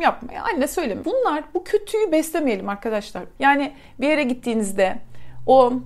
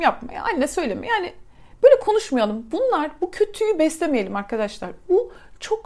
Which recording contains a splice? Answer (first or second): first